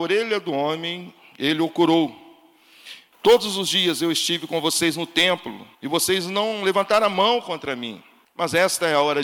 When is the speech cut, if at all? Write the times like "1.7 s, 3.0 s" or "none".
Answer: 3.1 s, 5.7 s

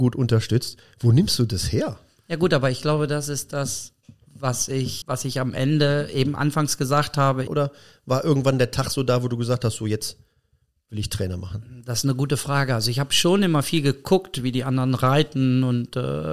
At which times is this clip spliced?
5.0 s, 7.5 s

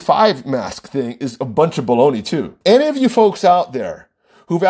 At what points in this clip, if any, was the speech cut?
2.6 s

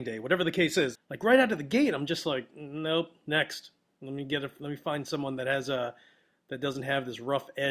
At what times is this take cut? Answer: 1.0 s

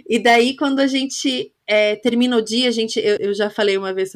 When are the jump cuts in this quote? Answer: 3.2 s

